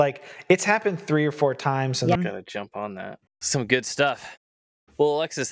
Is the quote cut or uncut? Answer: cut